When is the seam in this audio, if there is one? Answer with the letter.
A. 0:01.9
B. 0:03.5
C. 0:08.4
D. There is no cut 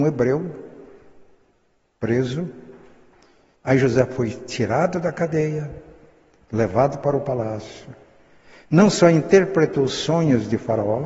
B